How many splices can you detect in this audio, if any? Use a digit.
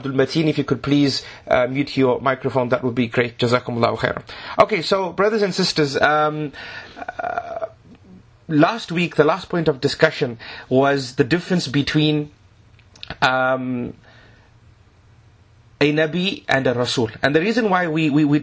0